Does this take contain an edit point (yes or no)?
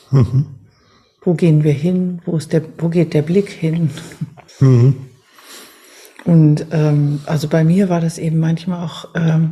yes